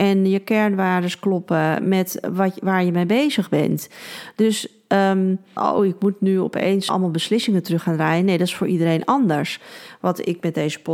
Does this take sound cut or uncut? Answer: cut